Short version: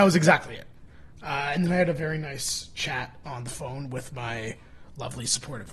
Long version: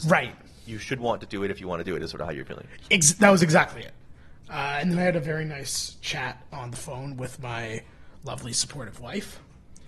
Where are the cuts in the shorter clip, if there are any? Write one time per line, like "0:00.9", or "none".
none